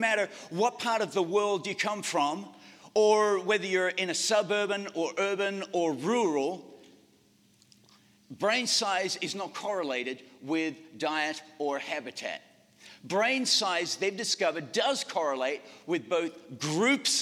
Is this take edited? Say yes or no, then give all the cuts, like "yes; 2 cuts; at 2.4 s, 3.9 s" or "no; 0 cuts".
no; 0 cuts